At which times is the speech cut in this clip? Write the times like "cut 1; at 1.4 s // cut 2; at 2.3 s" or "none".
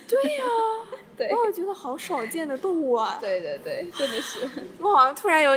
none